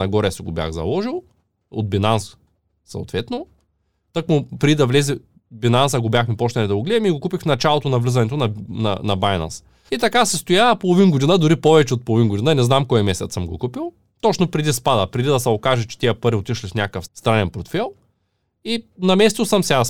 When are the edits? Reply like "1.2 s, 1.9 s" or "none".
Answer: 9.9 s, 17.1 s